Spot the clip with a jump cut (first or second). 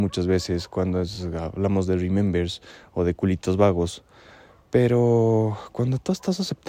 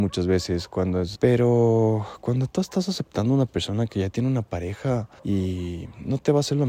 second